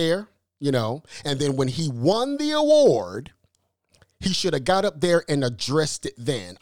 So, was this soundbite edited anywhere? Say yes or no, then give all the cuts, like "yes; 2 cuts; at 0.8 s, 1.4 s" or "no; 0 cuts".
no; 0 cuts